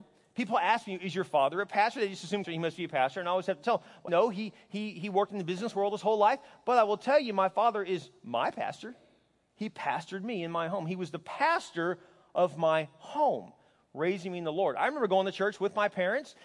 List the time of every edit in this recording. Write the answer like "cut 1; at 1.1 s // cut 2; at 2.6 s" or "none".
cut 1; at 2.4 s // cut 2; at 4.1 s